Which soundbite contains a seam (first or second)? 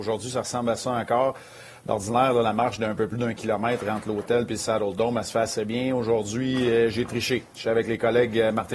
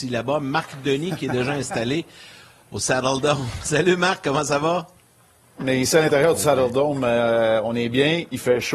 second